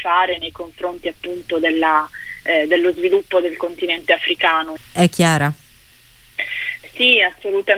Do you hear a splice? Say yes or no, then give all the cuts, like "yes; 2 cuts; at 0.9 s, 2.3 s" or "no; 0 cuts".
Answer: yes; 1 cut; at 4.8 s